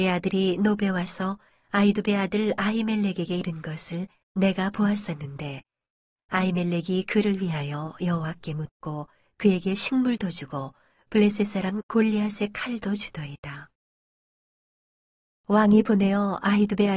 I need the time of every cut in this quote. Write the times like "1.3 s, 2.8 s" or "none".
none